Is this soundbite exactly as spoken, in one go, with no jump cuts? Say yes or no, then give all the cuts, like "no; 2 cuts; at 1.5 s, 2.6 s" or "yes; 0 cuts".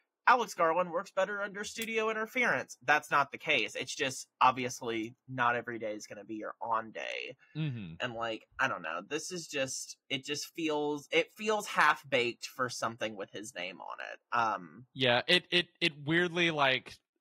yes; 0 cuts